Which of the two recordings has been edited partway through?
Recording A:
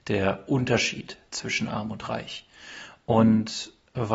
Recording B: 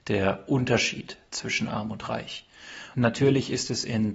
B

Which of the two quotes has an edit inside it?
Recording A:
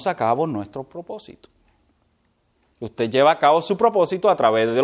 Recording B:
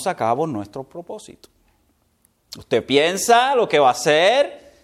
B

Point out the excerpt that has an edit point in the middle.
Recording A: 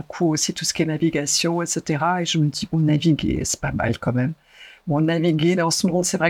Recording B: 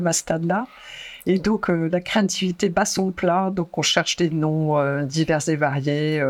A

